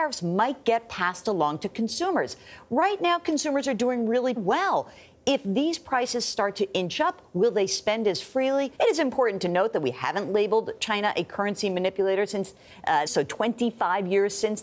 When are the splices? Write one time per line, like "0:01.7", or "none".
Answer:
0:04.4
0:08.7
0:13.1

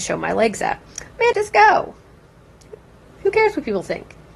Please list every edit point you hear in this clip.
0:01.3

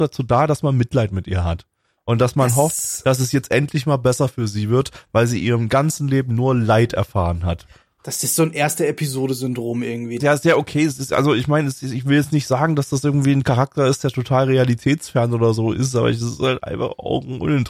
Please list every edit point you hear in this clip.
0:10.2

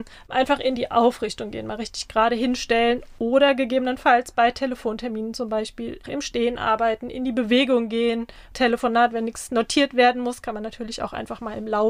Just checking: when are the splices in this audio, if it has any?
0:06.0

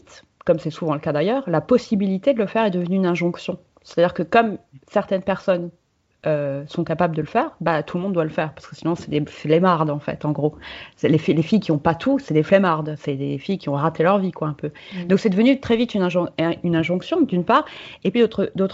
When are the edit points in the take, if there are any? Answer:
none

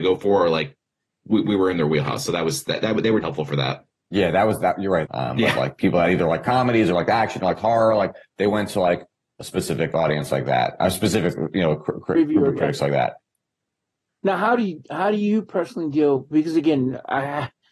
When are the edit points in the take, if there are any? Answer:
0:03.2
0:05.0

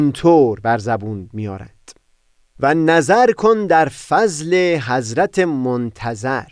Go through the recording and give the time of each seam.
none

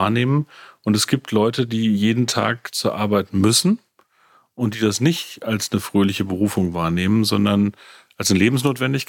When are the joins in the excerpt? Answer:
none

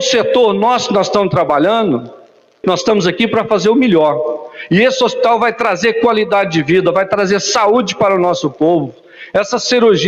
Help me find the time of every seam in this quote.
0:02.6

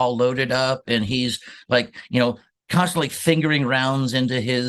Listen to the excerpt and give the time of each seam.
none

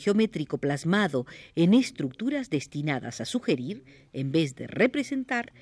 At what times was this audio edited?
none

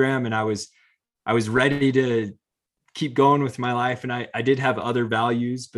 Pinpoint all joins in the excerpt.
none

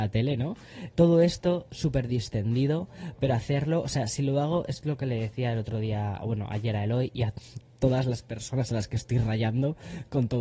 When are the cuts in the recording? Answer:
0:00.9

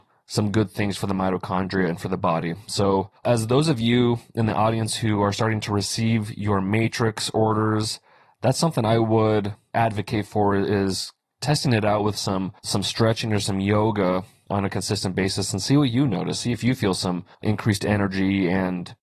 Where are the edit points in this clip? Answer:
0:03.2
0:12.6
0:17.3

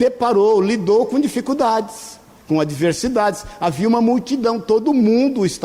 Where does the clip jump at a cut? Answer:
0:02.4

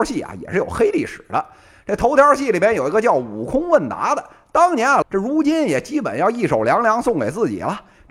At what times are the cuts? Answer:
0:05.0

